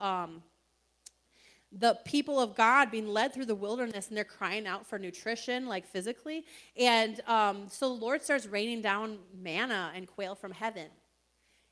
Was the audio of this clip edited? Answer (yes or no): no